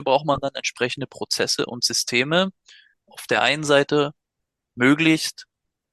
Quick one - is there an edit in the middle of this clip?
yes; 1 cut; at 2.9 s

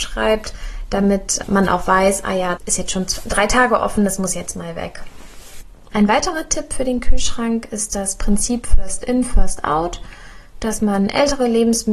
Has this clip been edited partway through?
yes; 1 cut; at 2.6 s

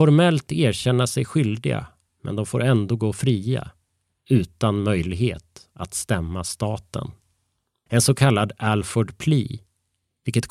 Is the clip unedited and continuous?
no; 1 cut; at 7.9 s

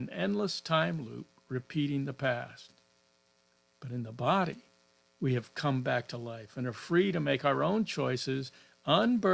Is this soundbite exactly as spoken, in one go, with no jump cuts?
yes; 0 cuts

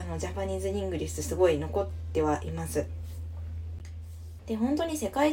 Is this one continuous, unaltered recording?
no; 1 cut; at 4.4 s

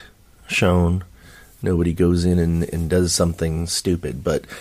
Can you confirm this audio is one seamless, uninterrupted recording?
yes; 0 cuts

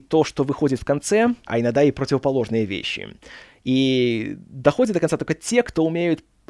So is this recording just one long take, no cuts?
no; 1 cut; at 1.5 s

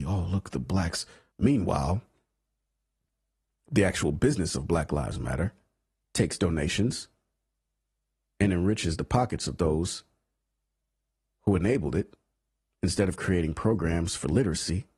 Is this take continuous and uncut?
no; 1 cut; at 1.3 s

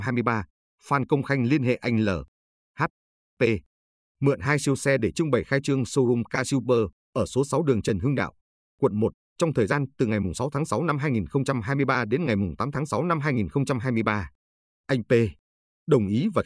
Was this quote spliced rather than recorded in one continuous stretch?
yes; 1 cut; at 8.6 s

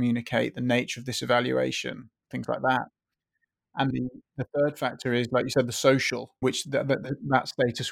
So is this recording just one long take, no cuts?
no; 2 cuts; at 3.9 s, 6.4 s

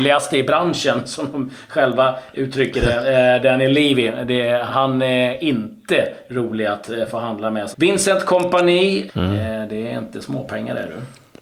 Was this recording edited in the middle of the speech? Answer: yes; 3 cuts; at 4.7 s, 7.7 s, 9.1 s

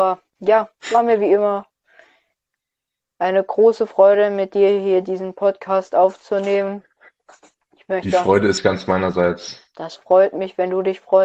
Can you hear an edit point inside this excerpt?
no; 0 cuts

